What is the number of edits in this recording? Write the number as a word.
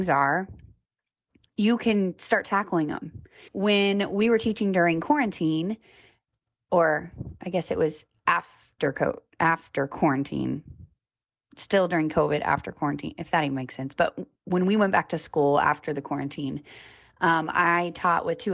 one